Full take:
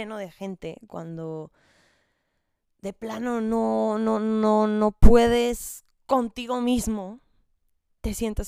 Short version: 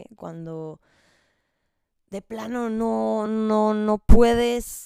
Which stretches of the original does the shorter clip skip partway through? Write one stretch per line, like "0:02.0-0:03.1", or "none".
0:04.0-0:04.2